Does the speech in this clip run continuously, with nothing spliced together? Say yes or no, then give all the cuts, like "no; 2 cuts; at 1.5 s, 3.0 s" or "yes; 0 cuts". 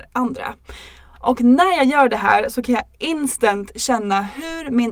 no; 1 cut; at 1.1 s